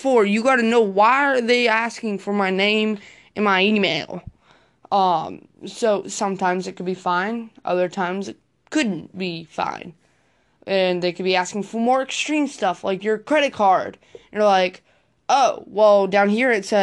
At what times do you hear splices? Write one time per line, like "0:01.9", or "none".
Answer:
none